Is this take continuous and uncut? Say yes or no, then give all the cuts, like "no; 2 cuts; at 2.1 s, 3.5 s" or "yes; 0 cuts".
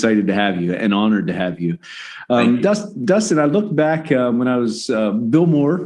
yes; 0 cuts